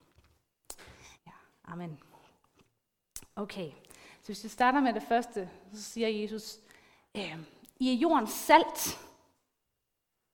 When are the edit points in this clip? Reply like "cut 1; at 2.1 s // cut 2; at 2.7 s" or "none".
cut 1; at 1.2 s